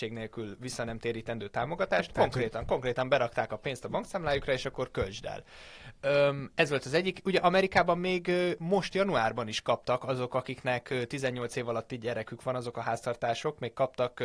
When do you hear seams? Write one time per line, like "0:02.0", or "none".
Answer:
0:02.1